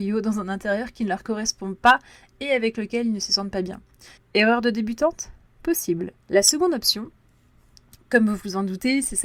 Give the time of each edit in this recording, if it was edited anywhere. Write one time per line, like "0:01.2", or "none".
0:04.2
0:06.2